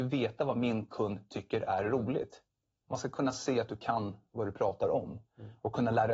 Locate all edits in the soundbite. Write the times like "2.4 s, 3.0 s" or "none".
2.8 s